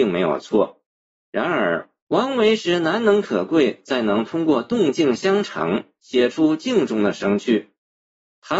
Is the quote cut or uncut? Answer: uncut